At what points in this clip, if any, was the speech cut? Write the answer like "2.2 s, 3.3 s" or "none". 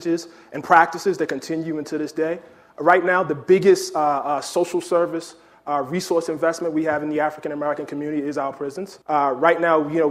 9.0 s